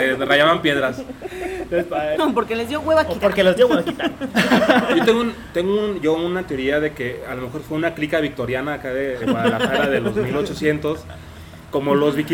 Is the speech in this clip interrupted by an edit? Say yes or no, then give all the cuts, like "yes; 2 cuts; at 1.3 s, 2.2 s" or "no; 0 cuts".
yes; 2 cuts; at 2.2 s, 9.2 s